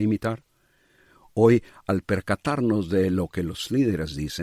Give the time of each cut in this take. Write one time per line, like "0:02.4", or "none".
none